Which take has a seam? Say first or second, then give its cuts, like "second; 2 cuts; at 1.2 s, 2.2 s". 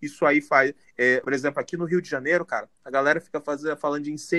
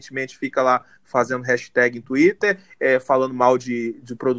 first; 1 cut; at 1.2 s